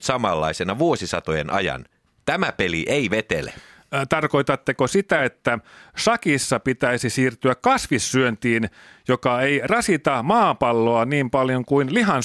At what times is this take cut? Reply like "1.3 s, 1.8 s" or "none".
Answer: none

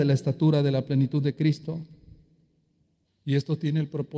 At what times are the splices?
3.1 s

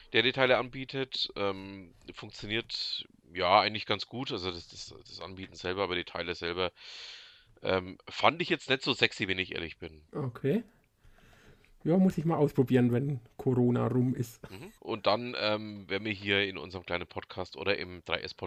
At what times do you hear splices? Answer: 10.1 s, 14.8 s

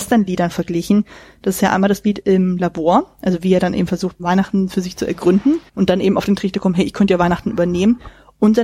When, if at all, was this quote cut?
4.2 s, 5.7 s

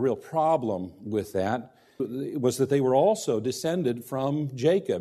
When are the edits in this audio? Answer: 2.0 s

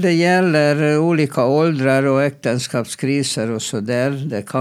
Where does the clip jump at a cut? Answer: none

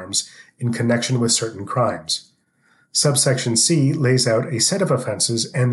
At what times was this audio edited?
none

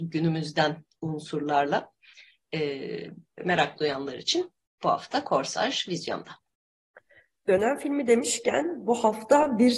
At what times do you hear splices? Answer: 3.4 s

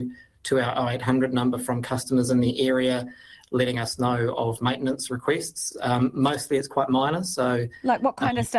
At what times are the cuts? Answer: none

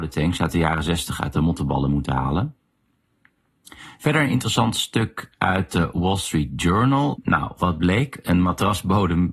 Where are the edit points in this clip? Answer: 7.1 s

